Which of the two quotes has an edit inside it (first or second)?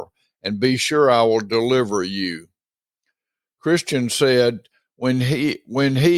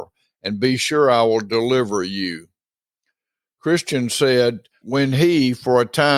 second